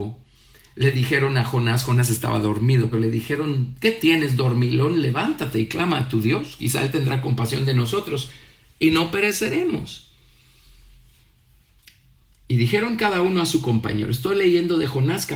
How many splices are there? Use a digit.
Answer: 1